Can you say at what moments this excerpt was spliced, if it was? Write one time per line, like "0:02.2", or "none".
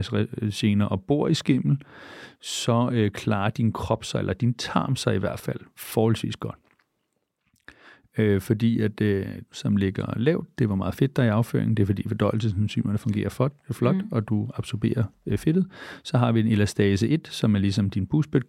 0:09.5